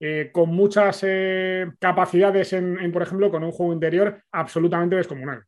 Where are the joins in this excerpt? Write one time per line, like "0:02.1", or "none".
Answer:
0:01.8
0:02.9